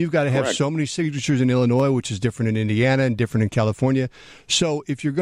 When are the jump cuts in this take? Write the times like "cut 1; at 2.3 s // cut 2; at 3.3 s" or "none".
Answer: none